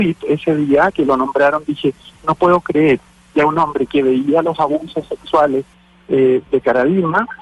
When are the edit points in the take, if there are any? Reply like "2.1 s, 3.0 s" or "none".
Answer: none